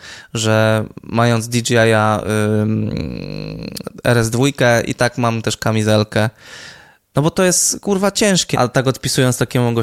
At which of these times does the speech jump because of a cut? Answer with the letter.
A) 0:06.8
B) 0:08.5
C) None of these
B